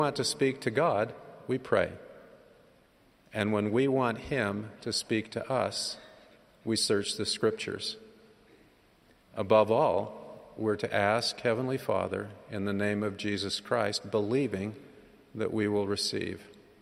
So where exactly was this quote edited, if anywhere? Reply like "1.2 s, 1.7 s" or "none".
9.2 s